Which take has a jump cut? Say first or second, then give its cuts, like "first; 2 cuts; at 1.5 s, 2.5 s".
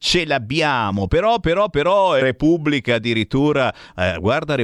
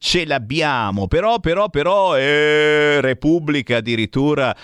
first; 1 cut; at 2.2 s